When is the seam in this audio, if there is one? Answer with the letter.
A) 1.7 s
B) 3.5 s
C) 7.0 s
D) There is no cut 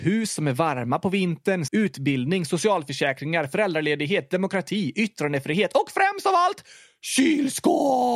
A